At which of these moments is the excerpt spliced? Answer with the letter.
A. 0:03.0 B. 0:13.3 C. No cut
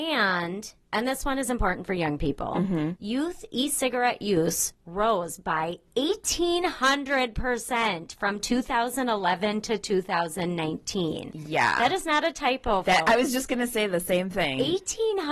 A